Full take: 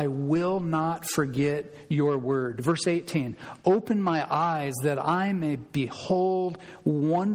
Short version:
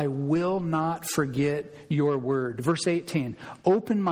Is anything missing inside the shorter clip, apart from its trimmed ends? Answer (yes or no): no